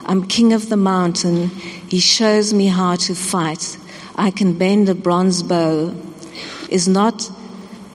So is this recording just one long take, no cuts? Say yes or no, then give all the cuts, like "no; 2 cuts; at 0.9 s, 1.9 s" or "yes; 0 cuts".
no; 1 cut; at 6.7 s